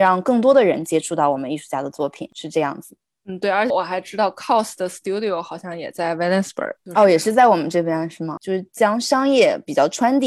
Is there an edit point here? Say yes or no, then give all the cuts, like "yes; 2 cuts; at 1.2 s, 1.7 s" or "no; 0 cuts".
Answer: yes; 2 cuts; at 3.7 s, 8.4 s